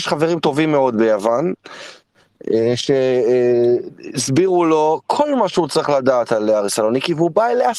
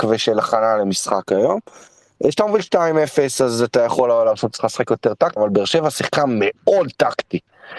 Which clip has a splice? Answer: second; 1 cut; at 5.4 s

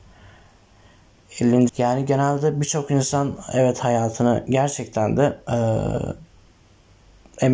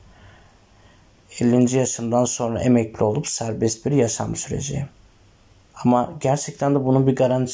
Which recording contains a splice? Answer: first; 1 cut; at 1.7 s

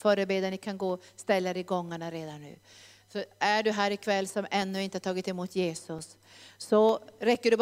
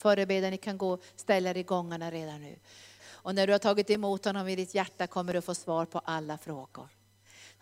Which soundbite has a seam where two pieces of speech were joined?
second; 1 cut; at 3.0 s

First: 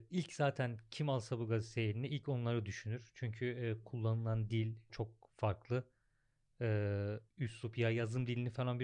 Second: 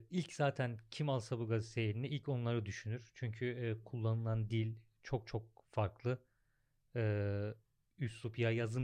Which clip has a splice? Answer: first; 2 cuts; at 4.9 s, 7.3 s

